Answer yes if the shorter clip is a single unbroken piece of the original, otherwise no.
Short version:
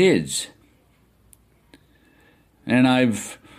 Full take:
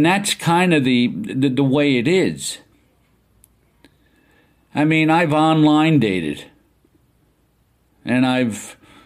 no